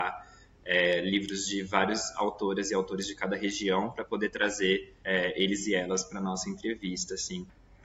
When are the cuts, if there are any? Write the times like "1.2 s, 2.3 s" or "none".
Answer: 5.0 s